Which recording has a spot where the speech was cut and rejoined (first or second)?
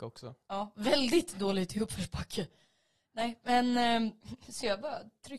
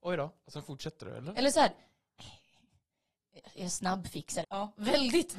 second